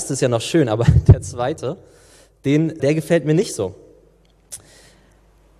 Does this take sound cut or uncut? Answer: cut